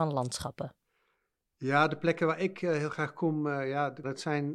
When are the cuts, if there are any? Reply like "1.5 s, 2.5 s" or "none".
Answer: none